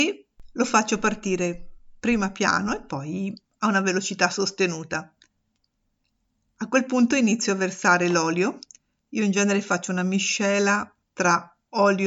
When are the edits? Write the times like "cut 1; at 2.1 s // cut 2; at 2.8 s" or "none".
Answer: none